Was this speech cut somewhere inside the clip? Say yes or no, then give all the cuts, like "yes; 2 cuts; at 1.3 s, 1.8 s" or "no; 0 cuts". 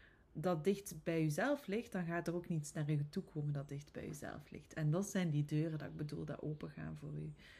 no; 0 cuts